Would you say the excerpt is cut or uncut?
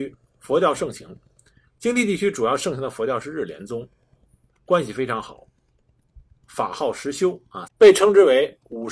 cut